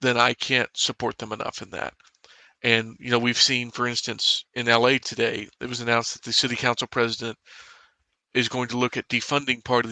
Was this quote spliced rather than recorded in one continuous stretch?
no; 0 cuts

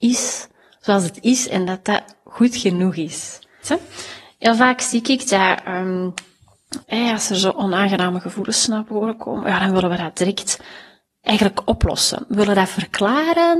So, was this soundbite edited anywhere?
yes; 2 cuts; at 3.6 s, 6.8 s

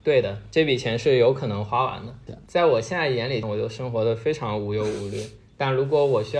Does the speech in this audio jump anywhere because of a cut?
yes; 2 cuts; at 2.3 s, 3.4 s

